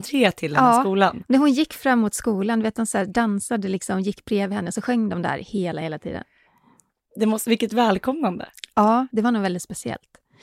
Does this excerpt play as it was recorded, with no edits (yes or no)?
yes